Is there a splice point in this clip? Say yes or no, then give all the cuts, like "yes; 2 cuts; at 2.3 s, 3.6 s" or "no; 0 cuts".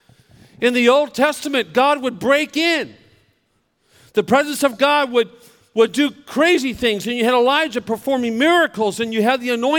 no; 0 cuts